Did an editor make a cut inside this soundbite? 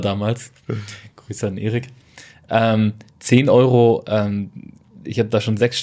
no; 0 cuts

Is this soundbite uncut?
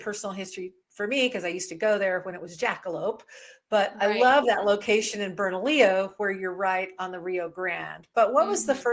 yes; 0 cuts

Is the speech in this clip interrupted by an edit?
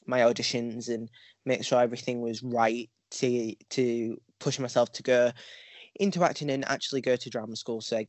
no; 0 cuts

